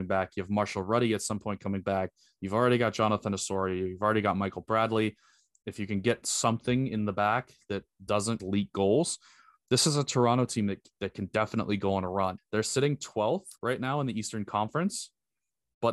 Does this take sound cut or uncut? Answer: cut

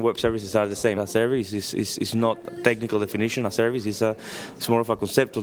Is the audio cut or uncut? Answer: cut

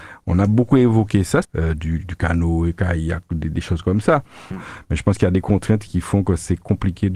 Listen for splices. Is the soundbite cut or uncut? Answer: cut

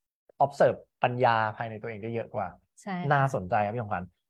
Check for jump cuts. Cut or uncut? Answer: uncut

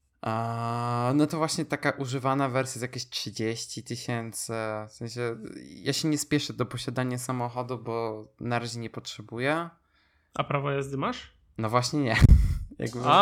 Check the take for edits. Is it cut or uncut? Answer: uncut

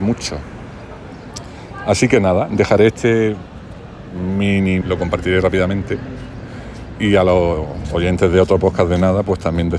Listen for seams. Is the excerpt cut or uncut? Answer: cut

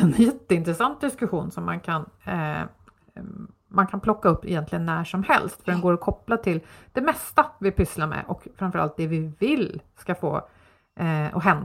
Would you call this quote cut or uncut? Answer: uncut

